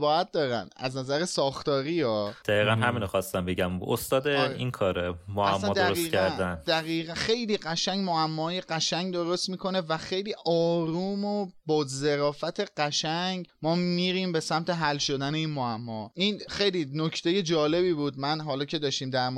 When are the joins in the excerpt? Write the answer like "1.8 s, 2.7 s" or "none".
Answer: none